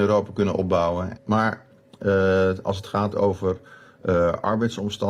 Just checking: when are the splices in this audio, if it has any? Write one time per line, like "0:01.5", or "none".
0:01.2